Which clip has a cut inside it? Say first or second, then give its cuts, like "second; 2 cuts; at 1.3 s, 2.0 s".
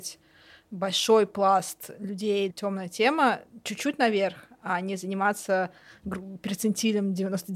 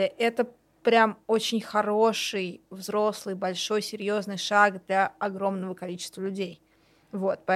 first; 1 cut; at 2.5 s